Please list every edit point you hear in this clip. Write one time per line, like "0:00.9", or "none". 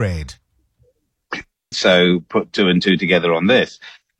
0:01.7